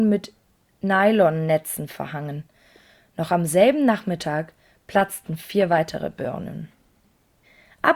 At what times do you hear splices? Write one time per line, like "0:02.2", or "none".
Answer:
none